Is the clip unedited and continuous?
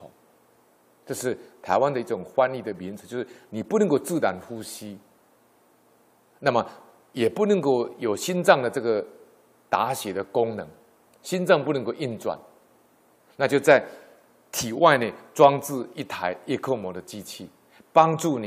yes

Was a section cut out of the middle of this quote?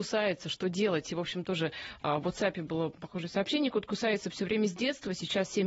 no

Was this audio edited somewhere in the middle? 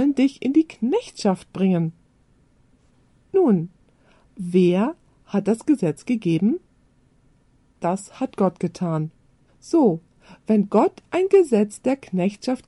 no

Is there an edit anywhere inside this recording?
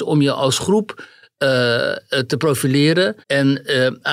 yes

